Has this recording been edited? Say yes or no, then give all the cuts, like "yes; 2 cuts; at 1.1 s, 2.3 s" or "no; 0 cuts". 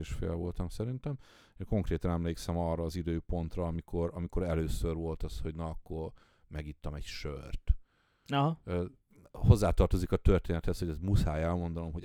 no; 0 cuts